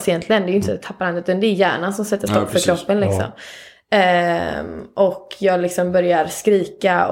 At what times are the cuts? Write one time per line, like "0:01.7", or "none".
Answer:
none